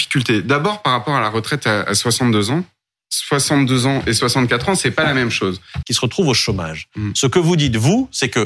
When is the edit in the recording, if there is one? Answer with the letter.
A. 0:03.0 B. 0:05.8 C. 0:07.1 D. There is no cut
B